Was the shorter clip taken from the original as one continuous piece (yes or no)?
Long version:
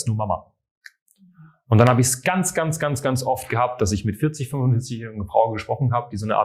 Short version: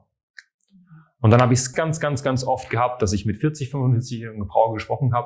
no